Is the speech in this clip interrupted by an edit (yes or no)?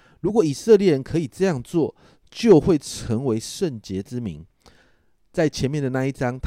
no